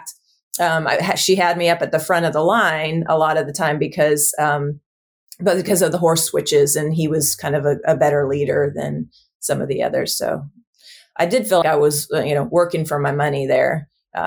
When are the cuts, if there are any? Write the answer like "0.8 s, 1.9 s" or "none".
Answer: 11.6 s